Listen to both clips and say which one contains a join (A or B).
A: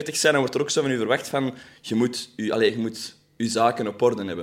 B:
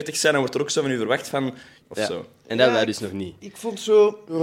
B